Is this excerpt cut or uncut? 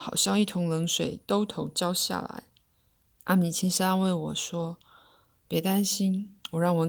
cut